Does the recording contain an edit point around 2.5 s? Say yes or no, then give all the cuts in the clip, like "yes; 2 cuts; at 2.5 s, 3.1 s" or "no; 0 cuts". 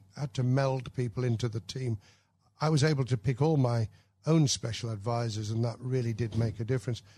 no; 0 cuts